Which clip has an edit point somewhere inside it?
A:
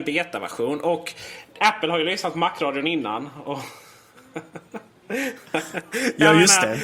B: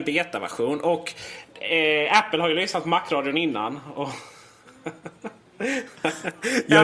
A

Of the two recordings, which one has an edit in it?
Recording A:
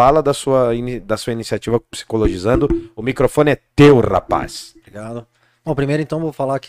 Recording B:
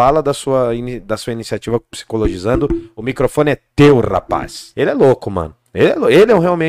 B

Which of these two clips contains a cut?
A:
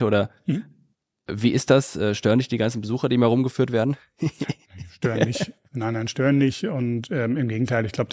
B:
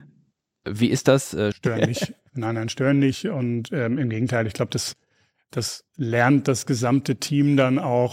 B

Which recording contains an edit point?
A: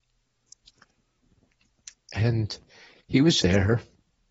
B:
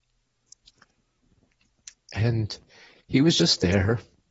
A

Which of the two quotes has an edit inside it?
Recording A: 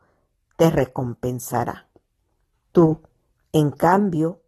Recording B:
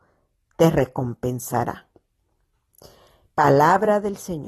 A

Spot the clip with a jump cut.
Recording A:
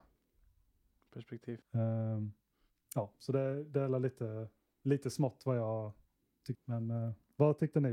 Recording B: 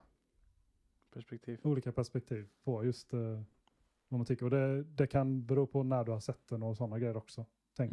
A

